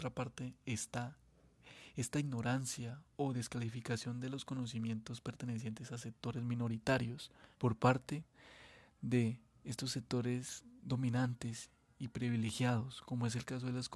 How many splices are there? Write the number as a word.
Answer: one